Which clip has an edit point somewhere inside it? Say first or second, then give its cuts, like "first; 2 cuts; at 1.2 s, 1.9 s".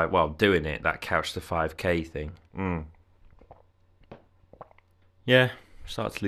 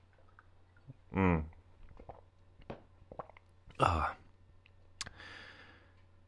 first; 2 cuts; at 2.5 s, 5.0 s